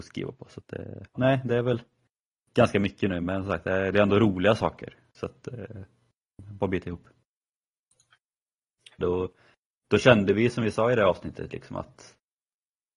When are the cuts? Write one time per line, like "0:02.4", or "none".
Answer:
0:01.1
0:09.0